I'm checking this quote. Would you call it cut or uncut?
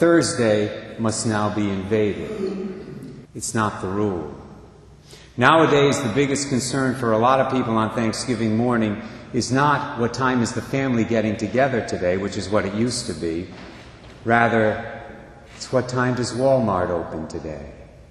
cut